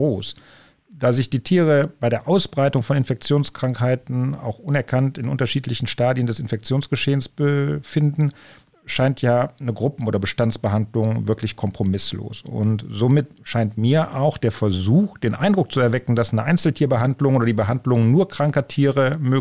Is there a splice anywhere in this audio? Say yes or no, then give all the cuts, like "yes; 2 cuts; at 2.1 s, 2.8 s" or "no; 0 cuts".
no; 0 cuts